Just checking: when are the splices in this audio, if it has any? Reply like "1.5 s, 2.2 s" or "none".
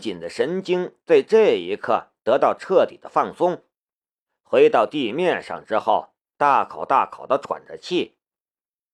6.3 s